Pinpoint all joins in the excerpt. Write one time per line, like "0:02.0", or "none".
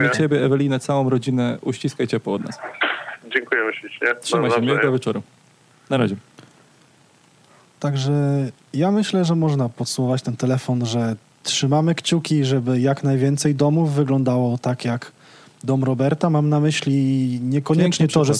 none